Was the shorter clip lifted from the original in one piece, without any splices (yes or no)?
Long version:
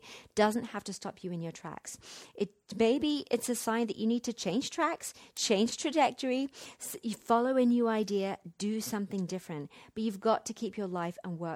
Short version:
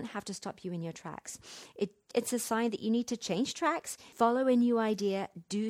no